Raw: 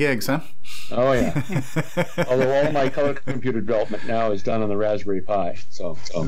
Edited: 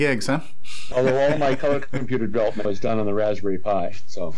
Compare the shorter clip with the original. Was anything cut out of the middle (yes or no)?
yes